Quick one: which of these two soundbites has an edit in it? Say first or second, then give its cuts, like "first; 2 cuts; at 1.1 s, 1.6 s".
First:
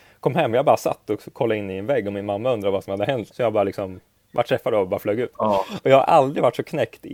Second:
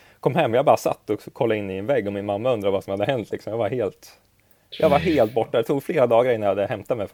first; 2 cuts; at 3.3 s, 5.3 s